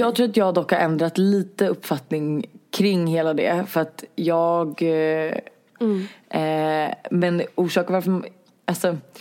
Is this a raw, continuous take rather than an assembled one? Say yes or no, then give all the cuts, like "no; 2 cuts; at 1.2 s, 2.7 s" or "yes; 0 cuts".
no; 1 cut; at 5.8 s